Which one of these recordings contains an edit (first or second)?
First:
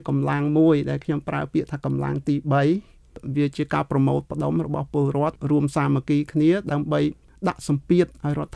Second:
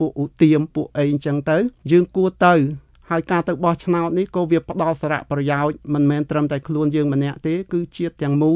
second